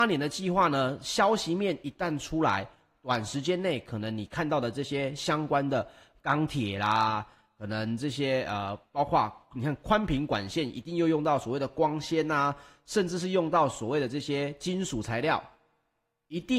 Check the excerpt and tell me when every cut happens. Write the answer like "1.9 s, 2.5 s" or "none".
none